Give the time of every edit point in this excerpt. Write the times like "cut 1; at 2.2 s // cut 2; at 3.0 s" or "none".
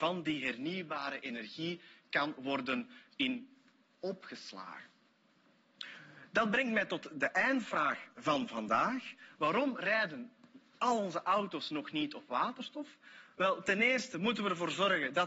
cut 1; at 3.1 s